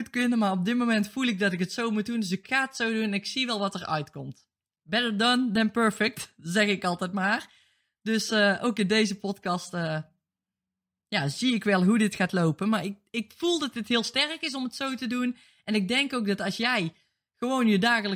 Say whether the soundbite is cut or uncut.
uncut